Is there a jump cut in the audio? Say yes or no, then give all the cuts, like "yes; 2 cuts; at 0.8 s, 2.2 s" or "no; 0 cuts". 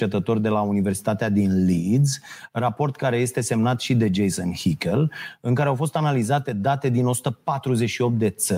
no; 0 cuts